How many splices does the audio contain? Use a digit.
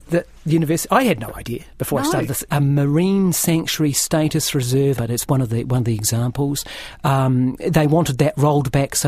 2